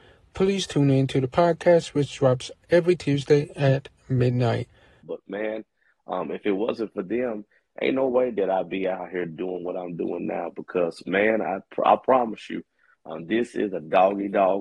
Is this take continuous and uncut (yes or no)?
no